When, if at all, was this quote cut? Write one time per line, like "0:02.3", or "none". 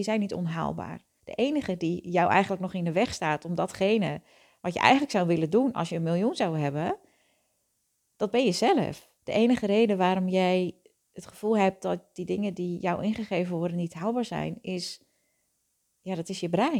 0:01.2
0:09.2